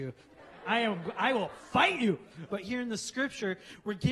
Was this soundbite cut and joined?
yes; 1 cut; at 2.5 s

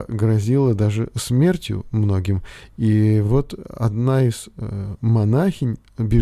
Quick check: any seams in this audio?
no; 0 cuts

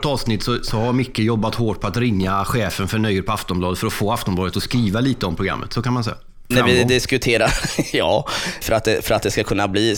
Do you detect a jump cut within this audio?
yes; 2 cuts; at 6.5 s, 8.6 s

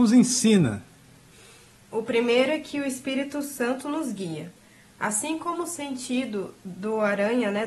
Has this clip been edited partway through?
no; 0 cuts

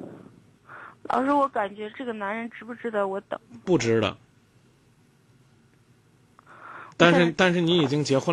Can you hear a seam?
yes; 2 cuts; at 1.9 s, 7.3 s

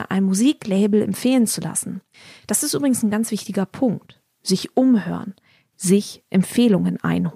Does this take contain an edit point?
no; 0 cuts

